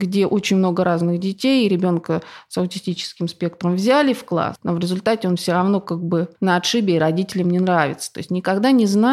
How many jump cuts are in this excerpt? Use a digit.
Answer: 0